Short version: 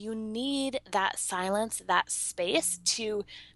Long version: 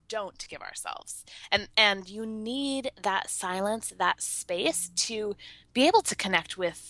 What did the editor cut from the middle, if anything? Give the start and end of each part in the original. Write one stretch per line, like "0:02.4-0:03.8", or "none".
none